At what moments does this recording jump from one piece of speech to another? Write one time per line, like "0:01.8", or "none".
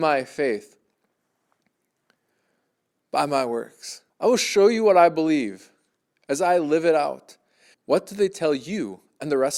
0:04.1
0:07.7